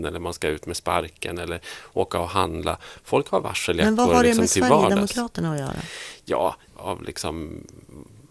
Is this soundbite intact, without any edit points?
no; 1 cut; at 6.7 s

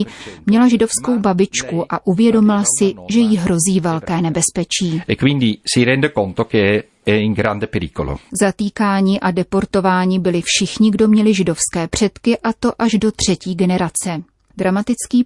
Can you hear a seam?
yes; 1 cut; at 8.3 s

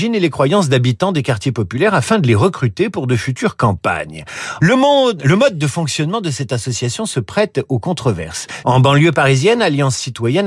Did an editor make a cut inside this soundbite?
yes; 2 cuts; at 4.6 s, 8.6 s

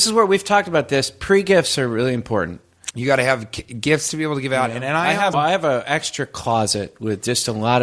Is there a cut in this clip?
yes; 2 cuts; at 2.9 s, 5.3 s

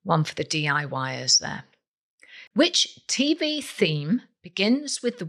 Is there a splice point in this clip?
yes; 1 cut; at 2.5 s

